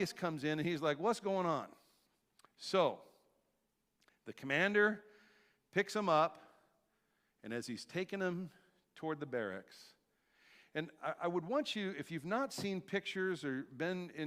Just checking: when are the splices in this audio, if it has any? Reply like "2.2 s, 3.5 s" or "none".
none